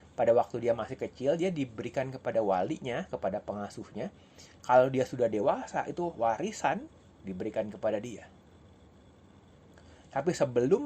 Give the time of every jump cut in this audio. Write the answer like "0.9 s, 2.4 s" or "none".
none